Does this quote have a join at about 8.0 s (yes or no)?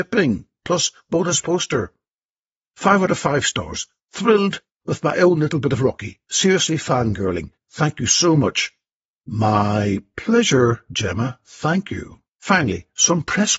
no